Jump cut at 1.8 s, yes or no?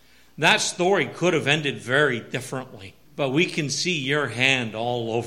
no